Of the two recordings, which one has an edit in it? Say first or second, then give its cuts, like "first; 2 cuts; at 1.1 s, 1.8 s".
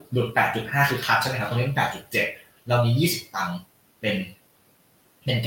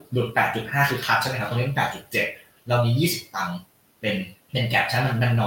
second; 1 cut; at 4.4 s